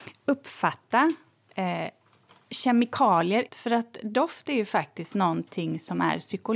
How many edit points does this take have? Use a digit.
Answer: 1